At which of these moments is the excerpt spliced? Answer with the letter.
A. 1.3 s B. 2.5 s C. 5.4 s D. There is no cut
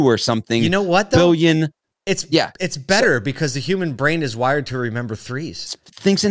D